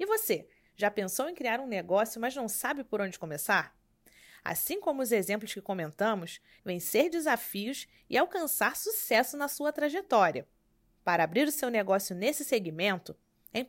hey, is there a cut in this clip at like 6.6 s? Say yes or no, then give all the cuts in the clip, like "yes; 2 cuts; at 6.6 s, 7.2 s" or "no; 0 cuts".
yes; 2 cuts; at 6.6 s, 10.9 s